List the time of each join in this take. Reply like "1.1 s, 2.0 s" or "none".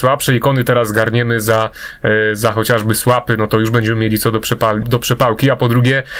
4.8 s